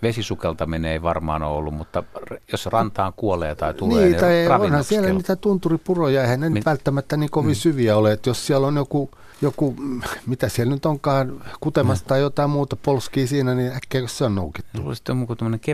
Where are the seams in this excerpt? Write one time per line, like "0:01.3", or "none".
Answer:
0:09.3

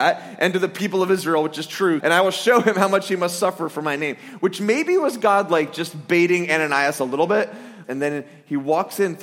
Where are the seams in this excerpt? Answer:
0:02.0
0:07.8

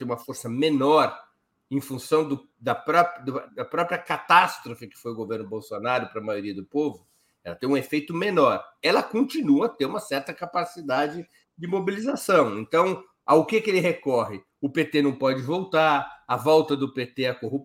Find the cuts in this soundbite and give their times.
0:03.5

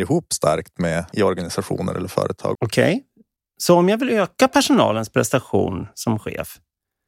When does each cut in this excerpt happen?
0:01.1
0:02.6

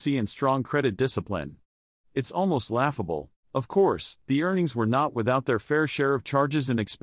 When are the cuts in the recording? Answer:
0:03.4

